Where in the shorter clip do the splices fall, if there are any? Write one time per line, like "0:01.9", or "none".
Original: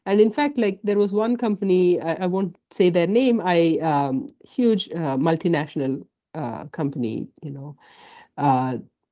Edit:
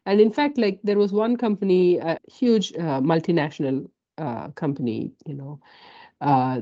0:02.2